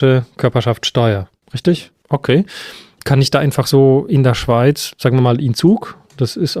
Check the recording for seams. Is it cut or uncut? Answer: cut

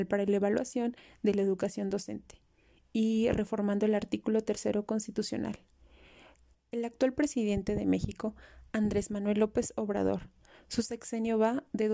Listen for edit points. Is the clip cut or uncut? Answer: cut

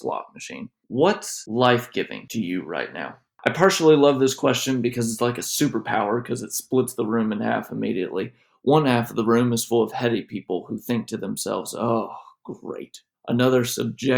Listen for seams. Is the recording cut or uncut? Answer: uncut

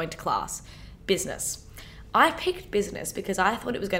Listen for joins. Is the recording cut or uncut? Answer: cut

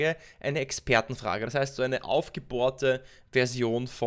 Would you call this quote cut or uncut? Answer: uncut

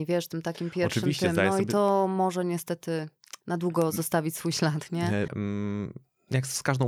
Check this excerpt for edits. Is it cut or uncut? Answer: cut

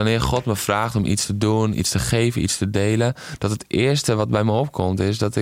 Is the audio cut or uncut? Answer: uncut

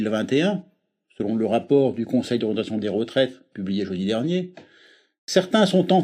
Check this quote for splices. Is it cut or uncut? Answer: uncut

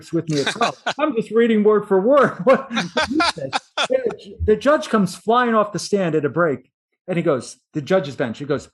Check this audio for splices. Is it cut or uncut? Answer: uncut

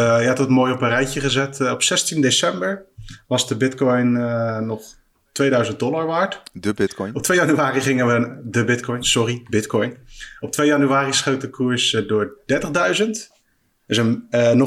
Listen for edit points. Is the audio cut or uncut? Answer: uncut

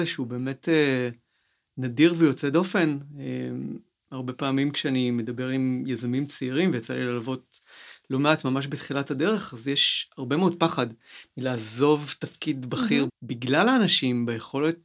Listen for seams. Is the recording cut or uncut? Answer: cut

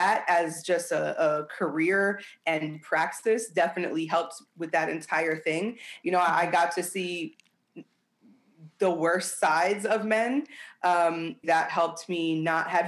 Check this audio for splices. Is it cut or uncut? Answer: cut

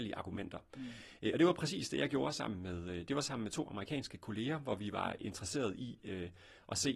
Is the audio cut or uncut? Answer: uncut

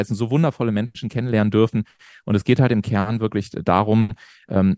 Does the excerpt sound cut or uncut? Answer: uncut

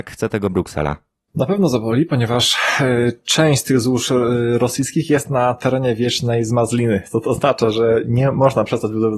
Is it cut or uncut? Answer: uncut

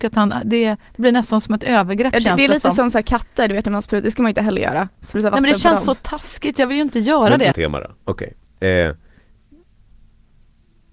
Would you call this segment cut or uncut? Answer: cut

